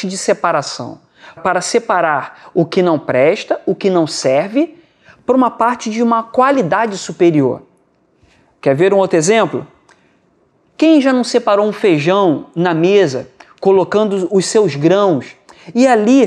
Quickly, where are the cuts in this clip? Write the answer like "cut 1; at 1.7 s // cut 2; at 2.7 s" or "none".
cut 1; at 1.4 s